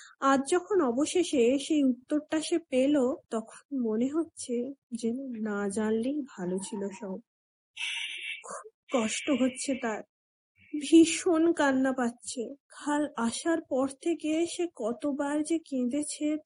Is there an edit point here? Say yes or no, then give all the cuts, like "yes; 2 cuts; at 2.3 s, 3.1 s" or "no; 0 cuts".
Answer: yes; 2 cuts; at 3.2 s, 12.6 s